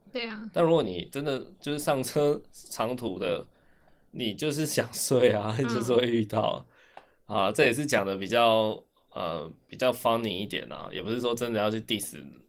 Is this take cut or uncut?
uncut